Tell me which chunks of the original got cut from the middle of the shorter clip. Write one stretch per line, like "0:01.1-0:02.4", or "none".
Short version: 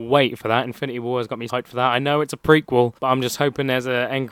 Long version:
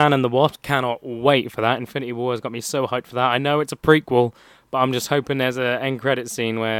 0:02.6-0:02.9
0:04.4-0:04.7